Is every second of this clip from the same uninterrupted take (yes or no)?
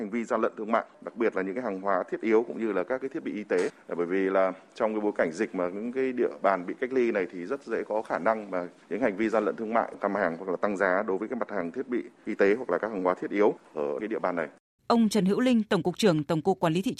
no